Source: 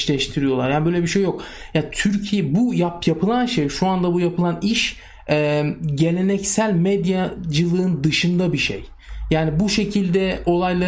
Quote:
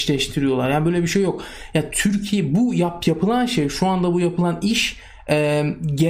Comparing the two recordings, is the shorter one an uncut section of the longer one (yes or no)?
yes